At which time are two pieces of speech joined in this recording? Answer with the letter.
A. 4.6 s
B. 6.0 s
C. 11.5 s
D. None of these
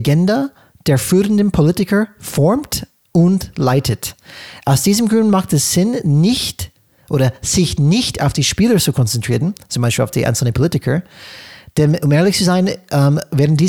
D